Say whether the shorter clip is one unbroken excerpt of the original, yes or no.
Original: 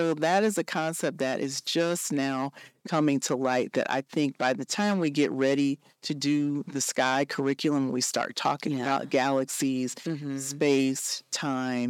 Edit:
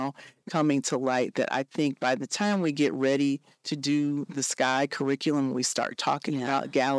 yes